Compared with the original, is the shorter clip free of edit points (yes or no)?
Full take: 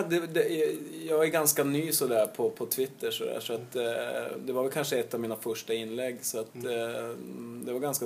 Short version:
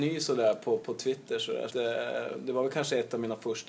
no